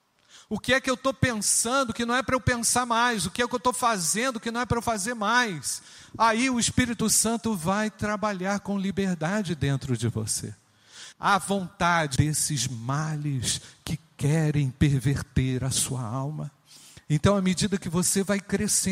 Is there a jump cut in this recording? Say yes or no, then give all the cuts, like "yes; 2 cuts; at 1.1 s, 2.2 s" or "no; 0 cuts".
yes; 2 cuts; at 11.1 s, 12.2 s